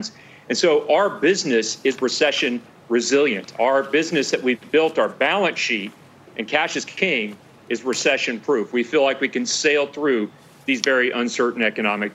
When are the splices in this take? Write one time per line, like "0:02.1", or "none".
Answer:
none

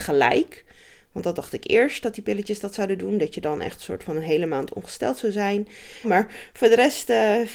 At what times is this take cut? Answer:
0:06.0

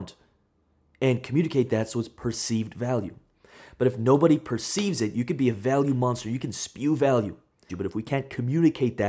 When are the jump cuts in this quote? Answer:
0:07.7

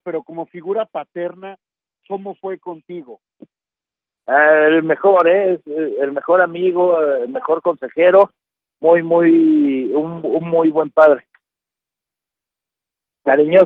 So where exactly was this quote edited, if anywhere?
none

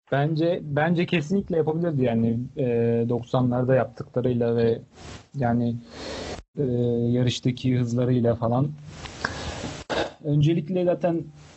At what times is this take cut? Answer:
0:06.5

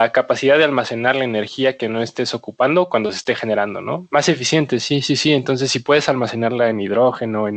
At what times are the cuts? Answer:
0:04.1

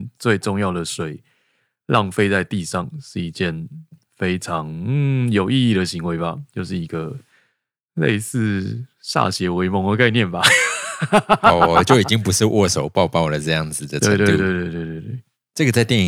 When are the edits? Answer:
none

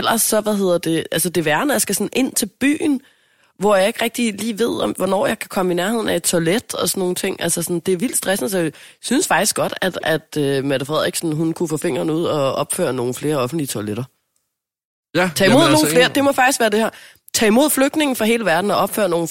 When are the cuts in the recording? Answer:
none

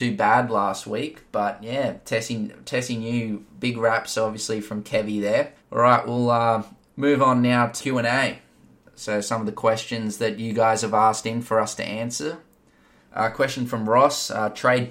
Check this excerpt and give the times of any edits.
0:05.6
0:13.0

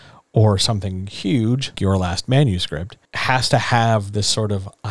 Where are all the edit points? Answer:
0:01.7
0:03.1

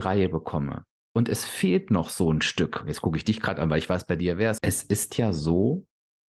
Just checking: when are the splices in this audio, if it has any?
0:04.6

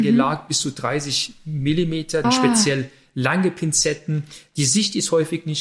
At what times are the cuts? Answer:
0:02.2

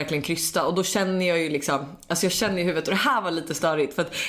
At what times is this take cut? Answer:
none

